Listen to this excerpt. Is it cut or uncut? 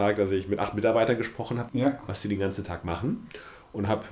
cut